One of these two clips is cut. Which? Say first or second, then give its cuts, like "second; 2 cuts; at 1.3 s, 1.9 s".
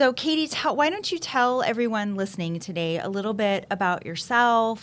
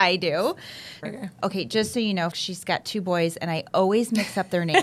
second; 2 cuts; at 1.0 s, 2.3 s